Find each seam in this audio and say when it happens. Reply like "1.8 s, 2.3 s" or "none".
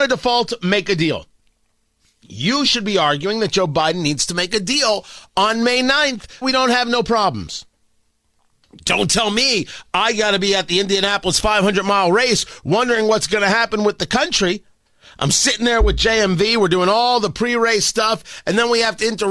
6.4 s